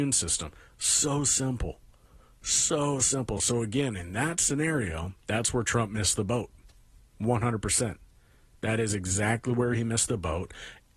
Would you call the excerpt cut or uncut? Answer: uncut